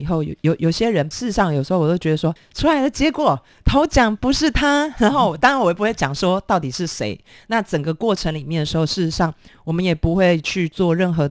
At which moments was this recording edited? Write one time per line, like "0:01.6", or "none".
0:01.1
0:02.4